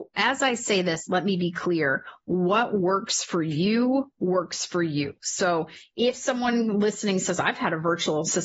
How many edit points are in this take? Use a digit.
0